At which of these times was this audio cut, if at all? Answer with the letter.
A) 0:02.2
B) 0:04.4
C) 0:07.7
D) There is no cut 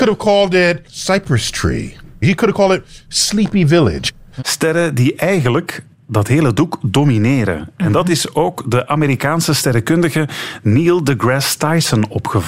B